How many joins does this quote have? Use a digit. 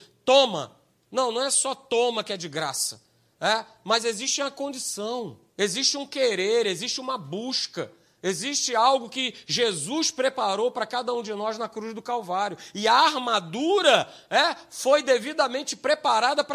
1